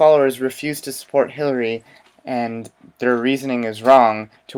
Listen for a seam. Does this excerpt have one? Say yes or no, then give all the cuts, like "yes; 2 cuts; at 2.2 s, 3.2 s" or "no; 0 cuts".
no; 0 cuts